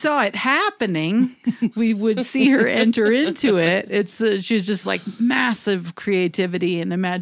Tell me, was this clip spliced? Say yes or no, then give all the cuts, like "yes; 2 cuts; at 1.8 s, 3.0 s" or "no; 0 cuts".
no; 0 cuts